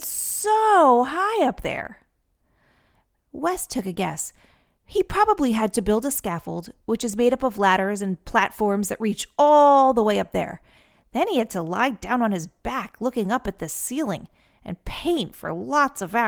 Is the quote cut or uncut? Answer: uncut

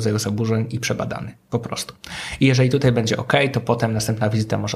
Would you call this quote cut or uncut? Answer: uncut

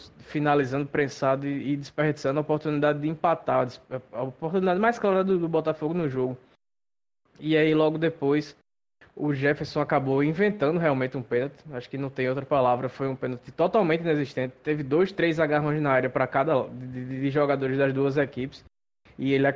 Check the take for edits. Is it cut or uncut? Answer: uncut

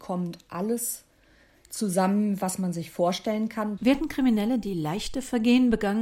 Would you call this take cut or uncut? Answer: cut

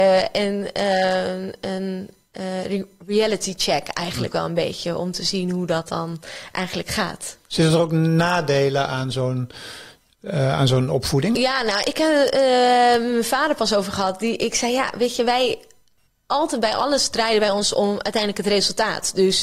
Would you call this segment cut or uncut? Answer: uncut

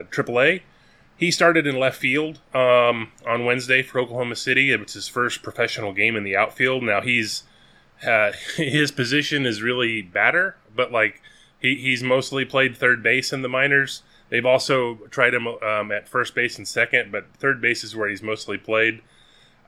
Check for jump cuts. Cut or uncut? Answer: uncut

